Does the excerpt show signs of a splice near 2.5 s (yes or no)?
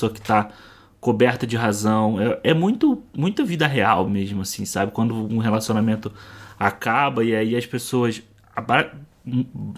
no